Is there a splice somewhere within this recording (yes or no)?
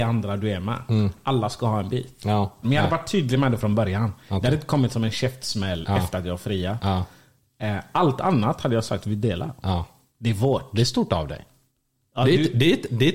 yes